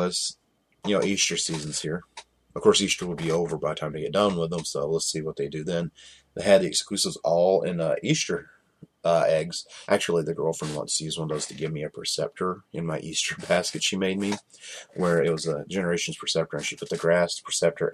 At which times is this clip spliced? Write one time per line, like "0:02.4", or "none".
0:09.8